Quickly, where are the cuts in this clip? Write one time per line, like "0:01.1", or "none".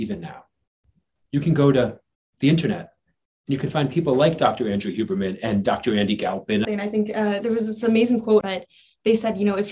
0:06.6
0:08.4